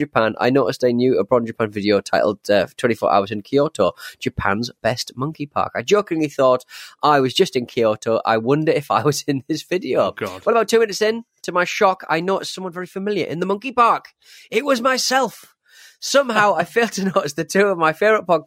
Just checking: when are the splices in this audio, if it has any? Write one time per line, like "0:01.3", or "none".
none